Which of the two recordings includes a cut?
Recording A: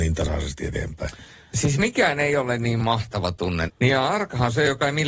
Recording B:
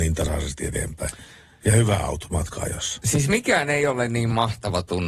A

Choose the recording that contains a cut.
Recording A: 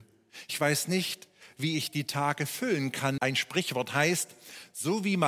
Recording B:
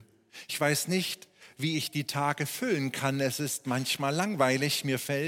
A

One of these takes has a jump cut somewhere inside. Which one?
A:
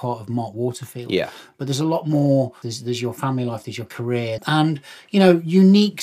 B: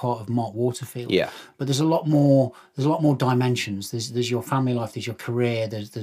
A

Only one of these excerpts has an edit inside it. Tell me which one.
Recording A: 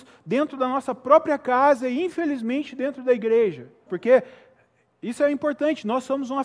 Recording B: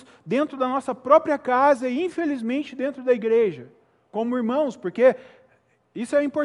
A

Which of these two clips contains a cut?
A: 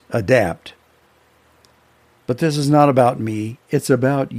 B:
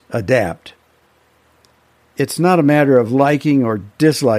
A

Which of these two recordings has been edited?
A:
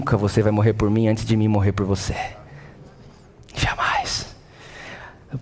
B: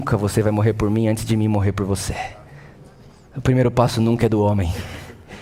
B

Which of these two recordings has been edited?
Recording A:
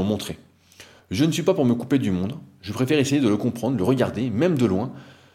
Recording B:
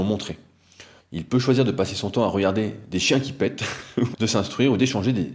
B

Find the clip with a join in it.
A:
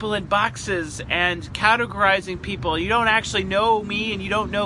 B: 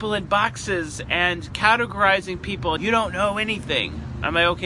B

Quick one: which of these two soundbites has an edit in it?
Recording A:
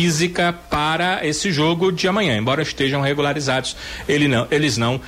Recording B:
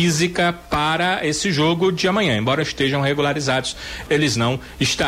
B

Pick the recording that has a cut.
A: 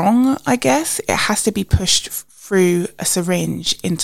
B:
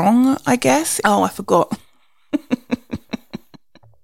B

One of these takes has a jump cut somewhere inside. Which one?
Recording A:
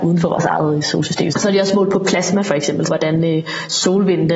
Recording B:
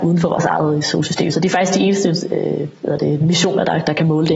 A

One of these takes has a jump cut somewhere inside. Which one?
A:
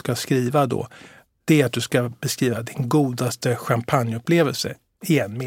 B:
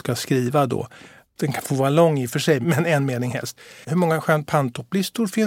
B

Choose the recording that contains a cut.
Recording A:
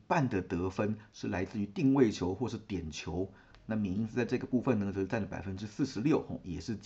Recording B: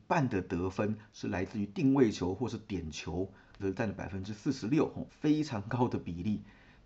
B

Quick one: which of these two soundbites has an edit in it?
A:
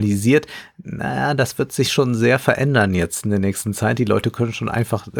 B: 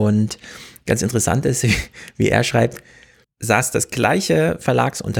B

